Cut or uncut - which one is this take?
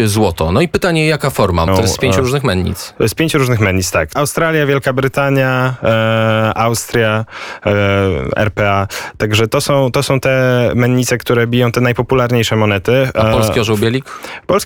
cut